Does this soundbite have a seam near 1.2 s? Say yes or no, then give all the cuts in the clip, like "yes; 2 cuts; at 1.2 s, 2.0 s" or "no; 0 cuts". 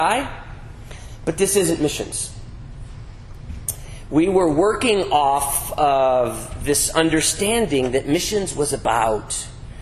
no; 0 cuts